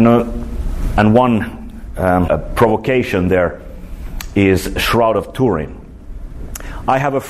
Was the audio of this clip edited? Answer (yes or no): yes